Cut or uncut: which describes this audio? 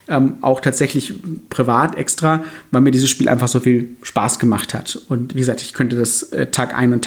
uncut